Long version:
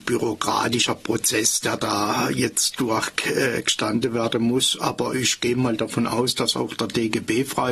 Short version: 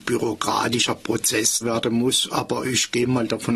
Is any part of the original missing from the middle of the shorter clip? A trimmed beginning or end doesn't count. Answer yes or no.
yes